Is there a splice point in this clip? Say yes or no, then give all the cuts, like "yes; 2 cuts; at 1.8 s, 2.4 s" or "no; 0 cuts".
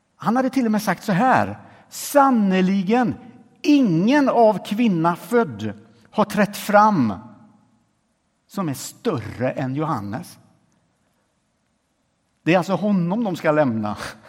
no; 0 cuts